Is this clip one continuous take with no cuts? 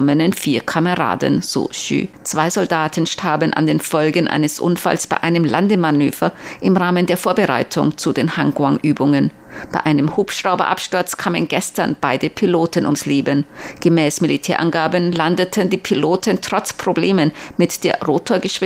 yes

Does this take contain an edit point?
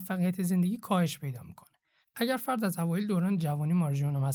no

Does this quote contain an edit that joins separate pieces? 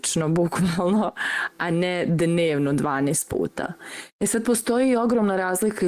yes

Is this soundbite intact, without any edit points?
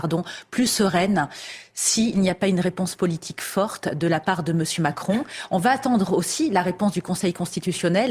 yes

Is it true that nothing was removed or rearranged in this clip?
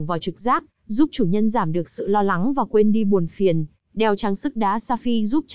yes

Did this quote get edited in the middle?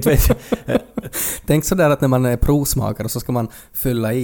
no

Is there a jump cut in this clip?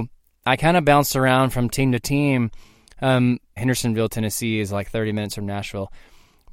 yes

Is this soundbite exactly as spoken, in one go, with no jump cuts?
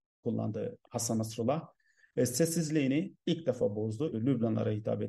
no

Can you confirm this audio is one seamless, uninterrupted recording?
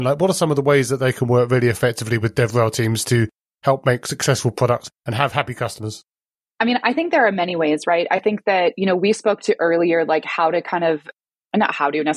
yes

